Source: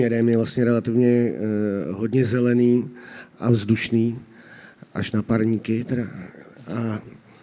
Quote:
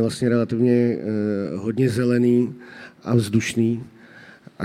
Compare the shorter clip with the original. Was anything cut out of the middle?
no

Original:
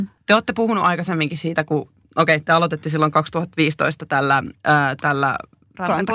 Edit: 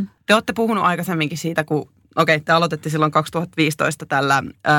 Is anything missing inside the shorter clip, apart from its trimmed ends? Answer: no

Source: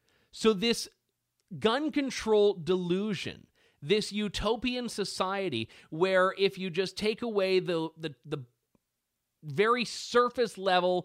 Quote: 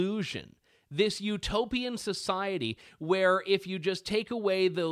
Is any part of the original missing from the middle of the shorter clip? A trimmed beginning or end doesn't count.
no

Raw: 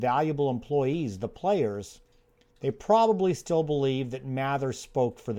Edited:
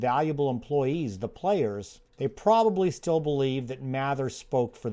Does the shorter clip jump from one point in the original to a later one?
yes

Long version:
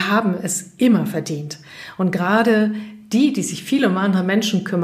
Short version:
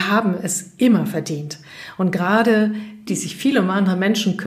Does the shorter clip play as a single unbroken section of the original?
no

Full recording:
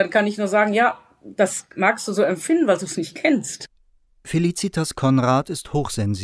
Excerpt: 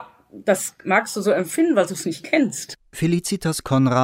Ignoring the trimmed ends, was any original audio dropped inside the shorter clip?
yes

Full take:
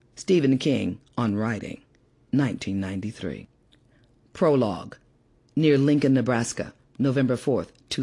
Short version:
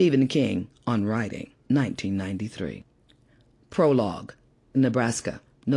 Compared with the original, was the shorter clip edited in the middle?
yes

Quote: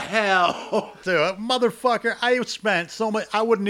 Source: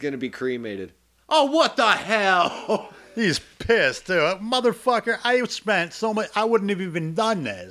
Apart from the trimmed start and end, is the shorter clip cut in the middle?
yes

